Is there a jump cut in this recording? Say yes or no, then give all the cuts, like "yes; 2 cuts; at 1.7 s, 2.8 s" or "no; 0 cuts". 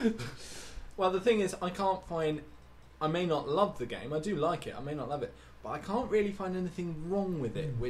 no; 0 cuts